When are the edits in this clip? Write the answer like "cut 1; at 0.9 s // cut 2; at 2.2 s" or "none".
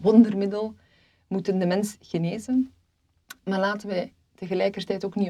none